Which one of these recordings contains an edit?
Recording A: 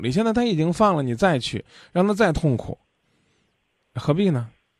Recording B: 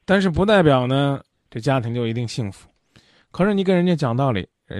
B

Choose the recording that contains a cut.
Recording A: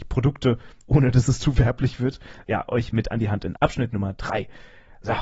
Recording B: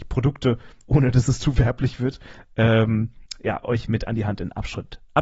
A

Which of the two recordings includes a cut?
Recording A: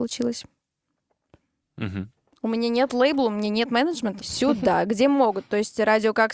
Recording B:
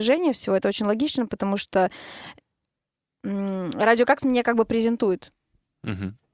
A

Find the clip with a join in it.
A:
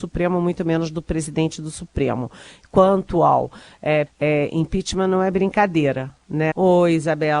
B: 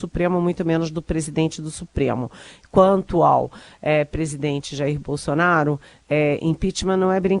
A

